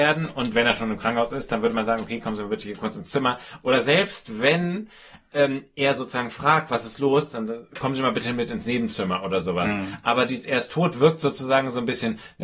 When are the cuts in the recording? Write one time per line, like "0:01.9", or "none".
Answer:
none